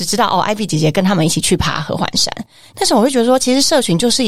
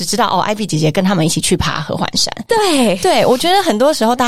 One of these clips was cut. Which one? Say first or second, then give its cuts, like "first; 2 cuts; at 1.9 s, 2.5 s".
second; 1 cut; at 2.5 s